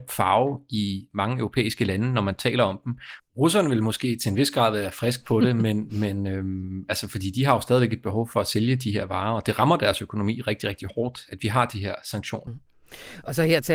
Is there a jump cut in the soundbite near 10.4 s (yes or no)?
no